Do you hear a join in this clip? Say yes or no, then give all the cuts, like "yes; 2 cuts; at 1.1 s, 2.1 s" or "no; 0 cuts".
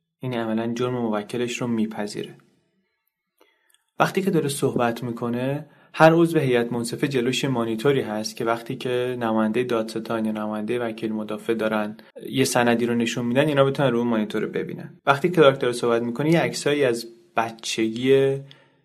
yes; 2 cuts; at 12.1 s, 15.0 s